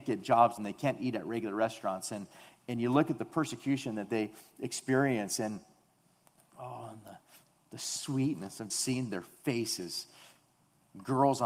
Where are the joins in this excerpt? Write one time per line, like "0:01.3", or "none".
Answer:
0:08.7